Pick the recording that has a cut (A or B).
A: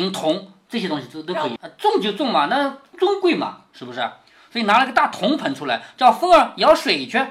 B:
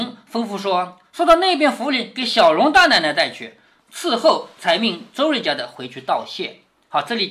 A